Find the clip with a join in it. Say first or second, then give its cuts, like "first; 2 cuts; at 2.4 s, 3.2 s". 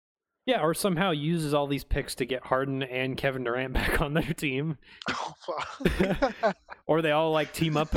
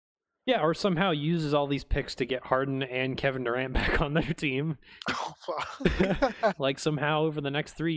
second; 1 cut; at 6.6 s